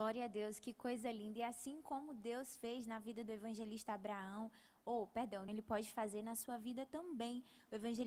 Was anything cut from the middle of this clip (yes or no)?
yes